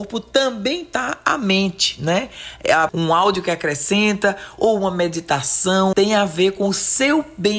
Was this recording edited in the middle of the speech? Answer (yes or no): yes